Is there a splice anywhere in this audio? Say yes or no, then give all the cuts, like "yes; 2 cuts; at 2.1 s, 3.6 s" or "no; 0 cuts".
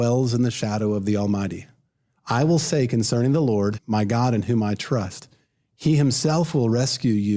yes; 1 cut; at 3.8 s